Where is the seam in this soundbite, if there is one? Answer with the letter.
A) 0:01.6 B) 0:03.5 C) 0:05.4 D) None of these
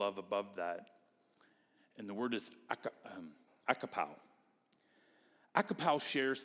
B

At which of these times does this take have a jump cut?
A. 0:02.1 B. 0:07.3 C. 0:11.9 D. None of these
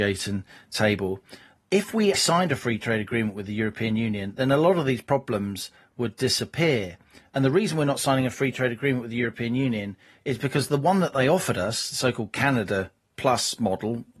A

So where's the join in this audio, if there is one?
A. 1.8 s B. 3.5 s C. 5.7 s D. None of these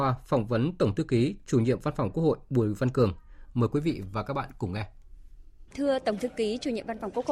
C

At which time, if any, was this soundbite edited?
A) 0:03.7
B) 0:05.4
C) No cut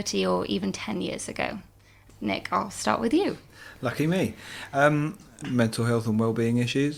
B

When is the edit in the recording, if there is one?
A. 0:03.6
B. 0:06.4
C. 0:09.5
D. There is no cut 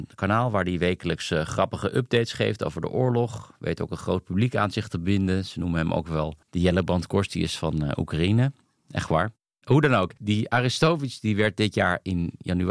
B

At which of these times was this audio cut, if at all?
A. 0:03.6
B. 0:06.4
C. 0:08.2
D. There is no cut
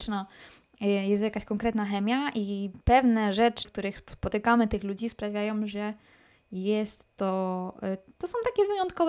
A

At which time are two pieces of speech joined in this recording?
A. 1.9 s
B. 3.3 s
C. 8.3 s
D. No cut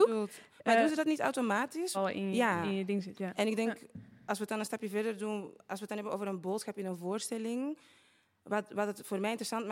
A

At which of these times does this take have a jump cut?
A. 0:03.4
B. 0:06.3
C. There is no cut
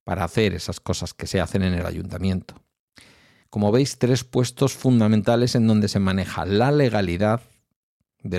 A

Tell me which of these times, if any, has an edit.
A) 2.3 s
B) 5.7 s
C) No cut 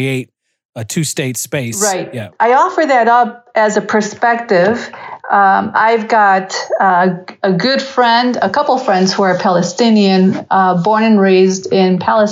A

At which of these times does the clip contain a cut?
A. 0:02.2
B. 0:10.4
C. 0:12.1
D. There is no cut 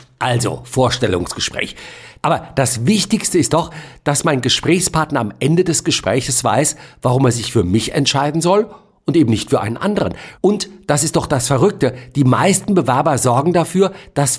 A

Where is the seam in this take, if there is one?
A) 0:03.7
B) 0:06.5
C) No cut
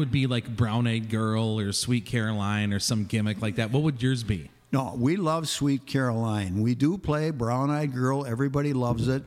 C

